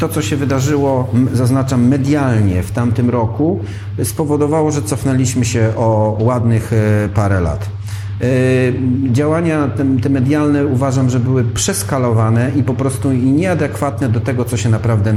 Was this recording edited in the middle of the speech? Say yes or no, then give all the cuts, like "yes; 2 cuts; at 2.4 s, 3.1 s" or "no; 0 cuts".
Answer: no; 0 cuts